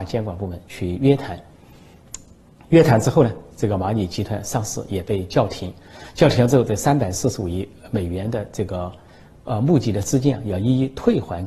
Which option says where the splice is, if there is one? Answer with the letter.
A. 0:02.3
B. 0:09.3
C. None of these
C